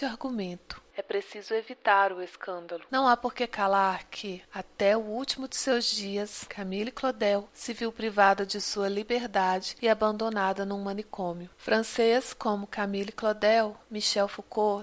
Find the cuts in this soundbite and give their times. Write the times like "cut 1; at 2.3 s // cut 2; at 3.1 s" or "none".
cut 1; at 6.5 s // cut 2; at 11.5 s

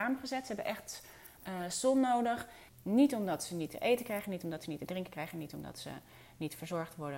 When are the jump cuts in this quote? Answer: cut 1; at 2.7 s

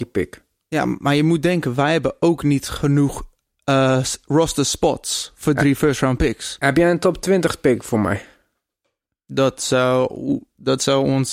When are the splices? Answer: none

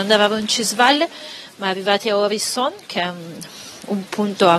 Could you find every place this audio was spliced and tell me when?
none

